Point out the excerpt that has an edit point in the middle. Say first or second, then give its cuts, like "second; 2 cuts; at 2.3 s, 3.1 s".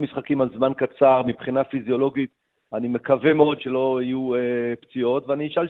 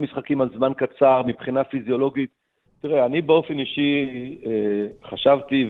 second; 1 cut; at 2.6 s